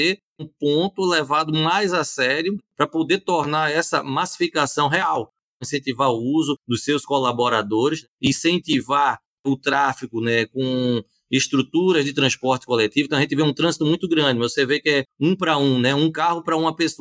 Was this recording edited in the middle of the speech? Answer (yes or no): no